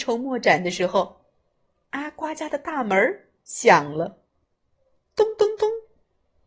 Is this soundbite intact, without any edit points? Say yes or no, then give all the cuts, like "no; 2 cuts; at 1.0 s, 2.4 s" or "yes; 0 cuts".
yes; 0 cuts